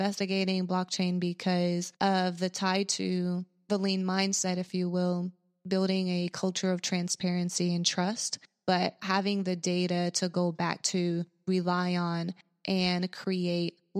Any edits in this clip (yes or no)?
yes